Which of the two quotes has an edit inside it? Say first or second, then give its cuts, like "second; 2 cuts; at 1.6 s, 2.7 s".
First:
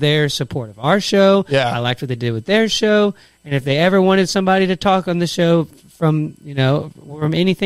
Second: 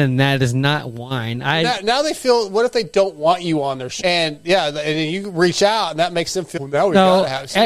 second; 2 cuts; at 4.0 s, 6.6 s